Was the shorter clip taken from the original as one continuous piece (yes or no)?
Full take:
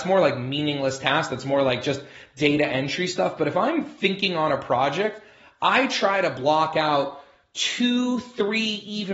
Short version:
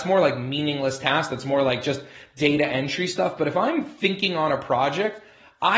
yes